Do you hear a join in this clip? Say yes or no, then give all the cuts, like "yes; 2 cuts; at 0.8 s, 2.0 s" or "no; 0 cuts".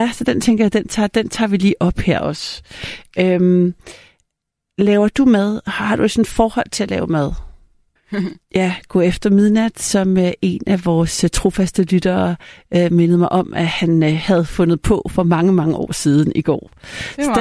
yes; 1 cut; at 8.0 s